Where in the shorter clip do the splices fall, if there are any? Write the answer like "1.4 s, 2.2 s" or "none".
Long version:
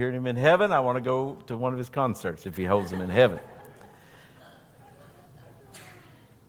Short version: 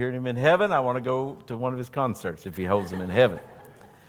none

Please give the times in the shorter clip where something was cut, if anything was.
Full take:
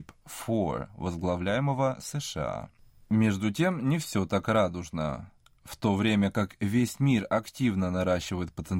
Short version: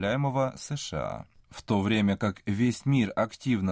1.4 s

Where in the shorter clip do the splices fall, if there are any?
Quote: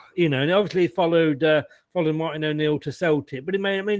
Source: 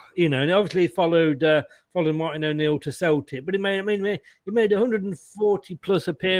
none

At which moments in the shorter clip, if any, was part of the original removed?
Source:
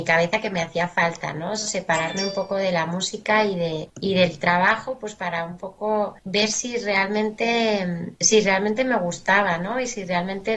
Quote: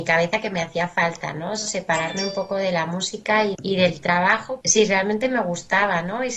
3.5 s, 4.6 s

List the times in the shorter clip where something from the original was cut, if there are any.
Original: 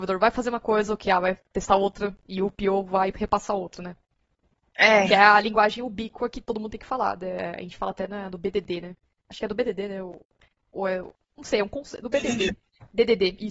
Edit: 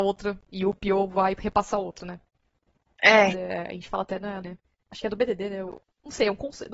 3.3 s, 4.4 s, 5.7 s

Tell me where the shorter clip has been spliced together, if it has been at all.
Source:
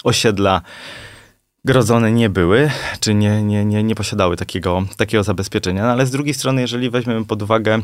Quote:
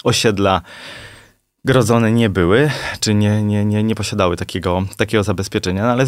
none

